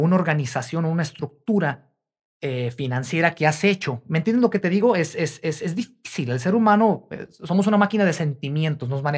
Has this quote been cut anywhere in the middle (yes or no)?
no